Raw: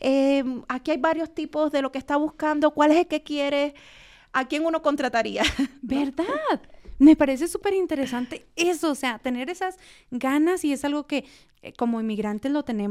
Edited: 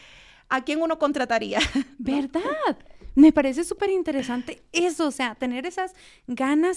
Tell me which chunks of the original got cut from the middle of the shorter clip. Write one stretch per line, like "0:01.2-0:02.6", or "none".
none

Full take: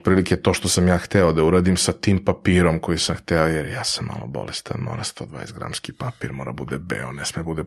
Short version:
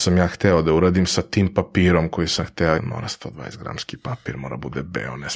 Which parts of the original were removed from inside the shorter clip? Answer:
0:03.5-0:04.7

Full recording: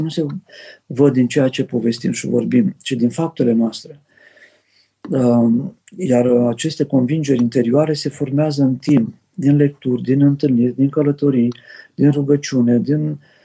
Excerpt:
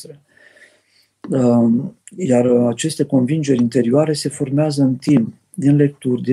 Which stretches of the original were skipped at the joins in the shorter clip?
none

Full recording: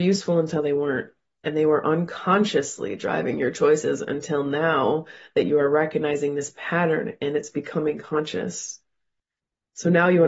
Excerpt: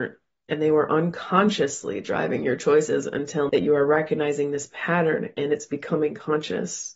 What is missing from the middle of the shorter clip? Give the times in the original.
0:04.4-0:05.3

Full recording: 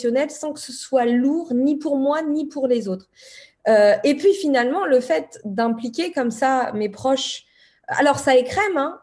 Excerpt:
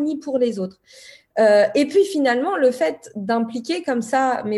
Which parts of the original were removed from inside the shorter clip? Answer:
none

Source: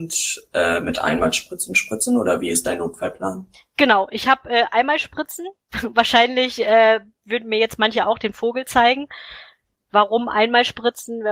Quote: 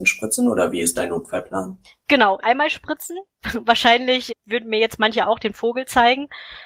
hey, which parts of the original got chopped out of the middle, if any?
0:04.1-0:04.7
0:06.6-0:07.1

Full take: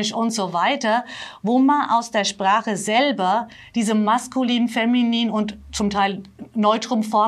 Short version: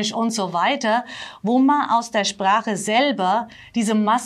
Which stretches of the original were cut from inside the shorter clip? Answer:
none

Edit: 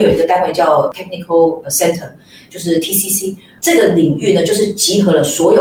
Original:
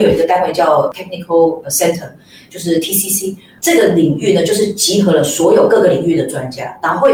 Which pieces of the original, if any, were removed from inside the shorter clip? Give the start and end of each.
none

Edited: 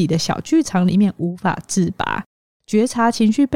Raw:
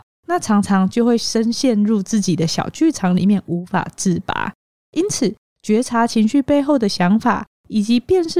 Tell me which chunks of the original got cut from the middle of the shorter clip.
0:04.8-0:05.5

